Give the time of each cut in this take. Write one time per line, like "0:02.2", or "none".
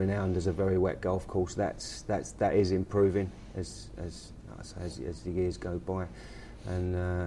none